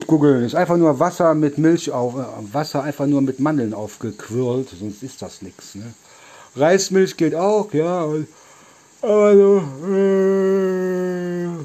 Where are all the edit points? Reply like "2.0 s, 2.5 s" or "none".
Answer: none